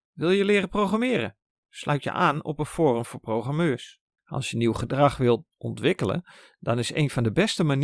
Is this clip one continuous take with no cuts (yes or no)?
no